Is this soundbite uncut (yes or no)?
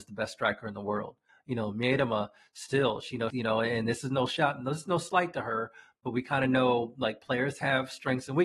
no